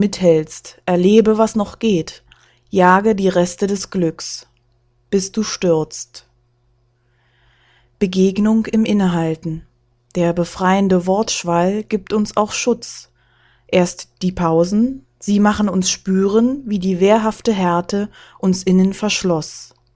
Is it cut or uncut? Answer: uncut